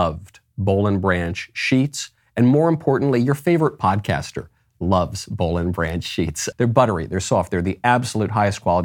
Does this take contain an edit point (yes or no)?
yes